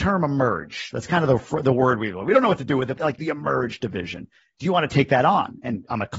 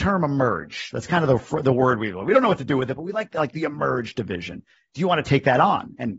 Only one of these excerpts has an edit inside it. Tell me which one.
first; 1 cut; at 2.9 s

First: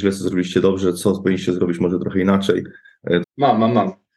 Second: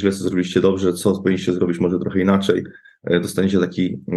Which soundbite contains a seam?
first; 1 cut; at 3.2 s

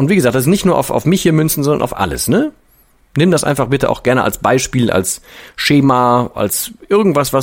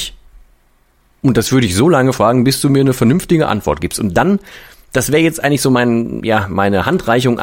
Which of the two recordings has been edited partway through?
second; 1 cut; at 6.2 s

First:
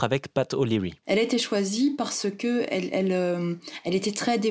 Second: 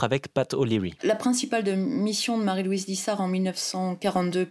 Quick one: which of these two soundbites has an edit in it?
second; 1 cut; at 1.0 s

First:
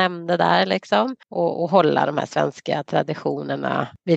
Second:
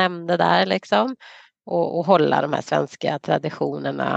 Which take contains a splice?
first; 1 cut; at 1.2 s

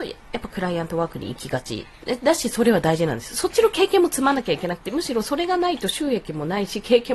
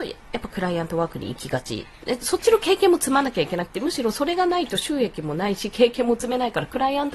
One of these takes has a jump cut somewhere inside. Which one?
second; 1 cut; at 2.2 s

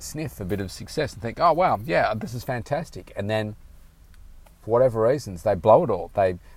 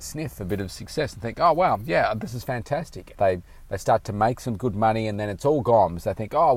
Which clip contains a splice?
second; 1 cut; at 3.1 s

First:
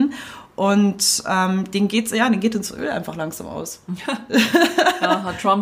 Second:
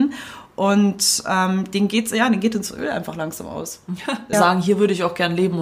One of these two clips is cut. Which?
second; 1 cut; at 4.3 s

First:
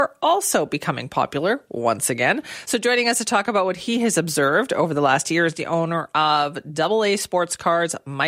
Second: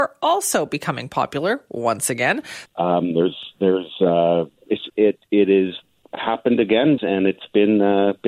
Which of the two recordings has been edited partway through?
second; 3 cuts; at 2.7 s, 4.9 s, 7.0 s

